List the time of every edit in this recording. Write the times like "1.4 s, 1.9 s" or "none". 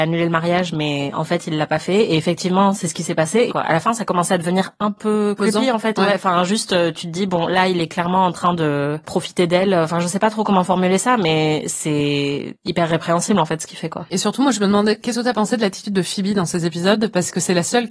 3.5 s